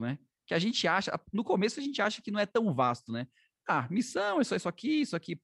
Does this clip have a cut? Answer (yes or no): no